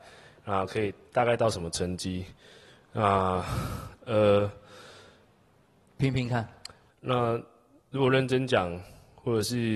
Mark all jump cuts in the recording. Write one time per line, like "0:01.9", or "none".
0:06.9